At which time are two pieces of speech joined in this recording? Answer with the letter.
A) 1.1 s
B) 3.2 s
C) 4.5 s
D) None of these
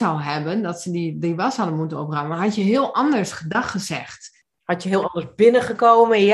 C